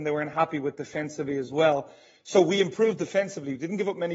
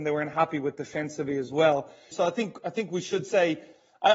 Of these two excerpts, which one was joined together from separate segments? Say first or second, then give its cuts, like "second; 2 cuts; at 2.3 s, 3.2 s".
second; 1 cut; at 2.1 s